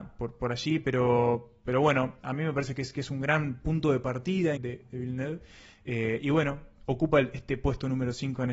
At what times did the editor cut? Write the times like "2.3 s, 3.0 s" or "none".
4.6 s